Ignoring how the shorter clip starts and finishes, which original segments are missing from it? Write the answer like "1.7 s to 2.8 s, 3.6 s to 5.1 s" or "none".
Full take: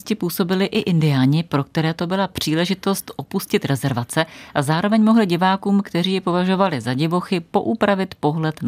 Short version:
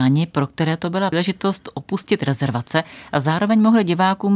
2.3 s to 2.5 s